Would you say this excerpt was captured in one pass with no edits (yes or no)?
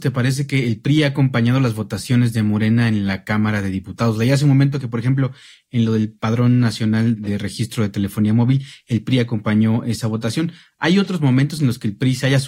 yes